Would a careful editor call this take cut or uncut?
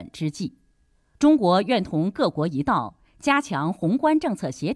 cut